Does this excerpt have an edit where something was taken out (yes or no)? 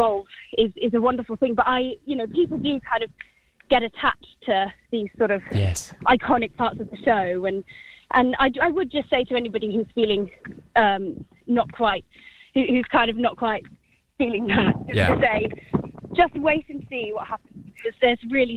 no